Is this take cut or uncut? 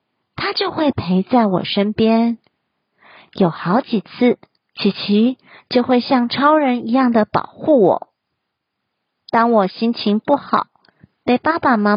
cut